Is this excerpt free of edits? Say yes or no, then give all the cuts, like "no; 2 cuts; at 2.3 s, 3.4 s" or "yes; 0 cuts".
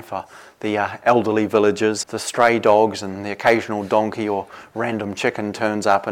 no; 1 cut; at 2.0 s